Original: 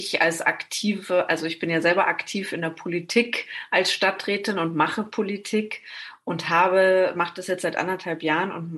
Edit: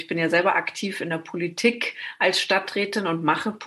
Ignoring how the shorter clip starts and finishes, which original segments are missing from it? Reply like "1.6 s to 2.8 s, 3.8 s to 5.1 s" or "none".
none

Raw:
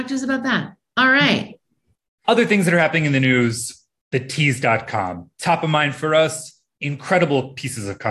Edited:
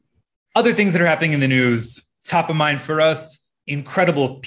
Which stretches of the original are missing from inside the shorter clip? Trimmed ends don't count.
3.9 s to 5.3 s

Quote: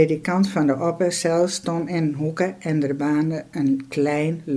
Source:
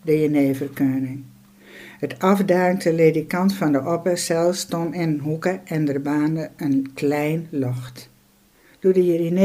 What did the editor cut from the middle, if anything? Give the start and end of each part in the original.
none

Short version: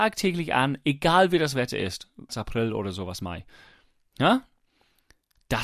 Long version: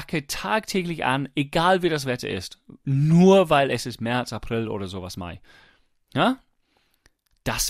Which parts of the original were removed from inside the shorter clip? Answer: 2.8 s to 4.2 s

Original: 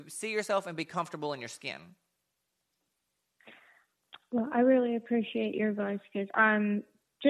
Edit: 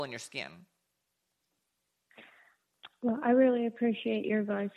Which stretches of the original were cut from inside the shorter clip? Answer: none

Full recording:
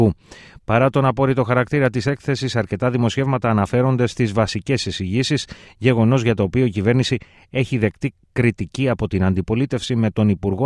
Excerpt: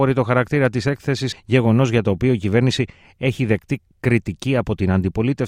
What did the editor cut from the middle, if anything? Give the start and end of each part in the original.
2.5 s to 5.6 s

